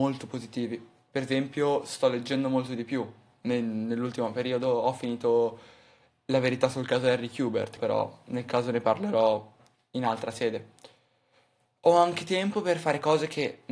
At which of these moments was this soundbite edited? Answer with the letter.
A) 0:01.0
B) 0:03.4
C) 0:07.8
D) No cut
C